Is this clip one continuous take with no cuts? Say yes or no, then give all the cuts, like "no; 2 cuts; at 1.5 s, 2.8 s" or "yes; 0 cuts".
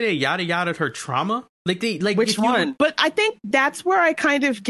no; 2 cuts; at 1.6 s, 2.8 s